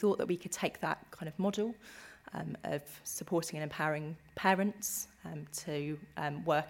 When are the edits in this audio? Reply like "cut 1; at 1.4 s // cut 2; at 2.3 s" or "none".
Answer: none